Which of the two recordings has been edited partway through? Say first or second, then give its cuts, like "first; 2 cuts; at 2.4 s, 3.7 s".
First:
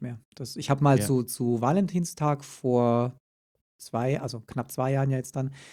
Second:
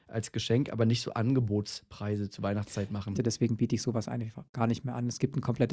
second; 1 cut; at 3.1 s